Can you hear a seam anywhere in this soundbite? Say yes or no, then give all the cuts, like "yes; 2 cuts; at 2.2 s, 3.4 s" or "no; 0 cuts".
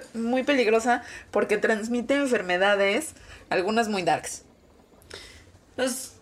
no; 0 cuts